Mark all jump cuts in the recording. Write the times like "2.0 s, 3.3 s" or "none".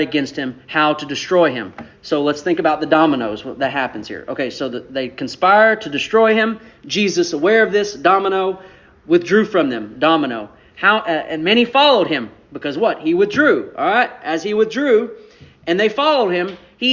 none